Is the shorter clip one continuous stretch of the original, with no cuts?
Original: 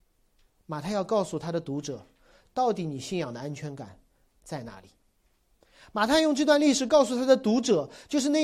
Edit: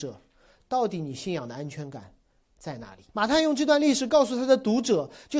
no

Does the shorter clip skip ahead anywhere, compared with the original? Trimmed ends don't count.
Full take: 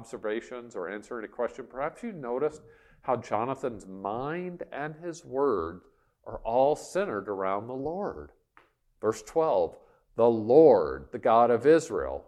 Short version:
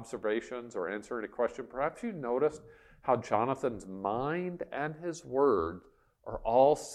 no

